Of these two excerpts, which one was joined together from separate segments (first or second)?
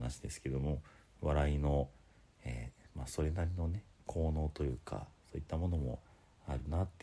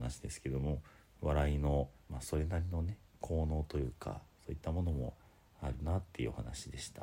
second